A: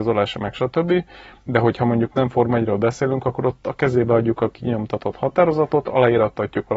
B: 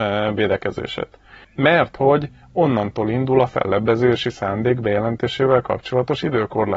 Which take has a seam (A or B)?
B